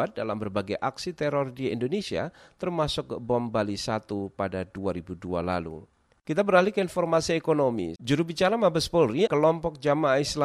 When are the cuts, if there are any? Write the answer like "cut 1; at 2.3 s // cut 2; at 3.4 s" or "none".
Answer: cut 1; at 8.0 s // cut 2; at 9.3 s